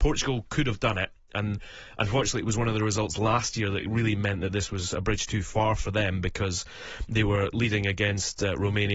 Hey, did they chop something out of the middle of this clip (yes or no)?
no